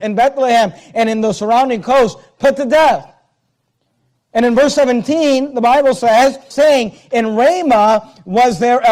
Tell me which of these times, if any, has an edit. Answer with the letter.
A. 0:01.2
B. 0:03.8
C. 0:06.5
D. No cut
C